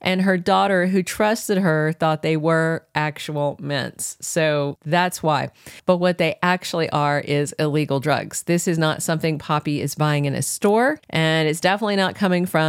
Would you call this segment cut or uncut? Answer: cut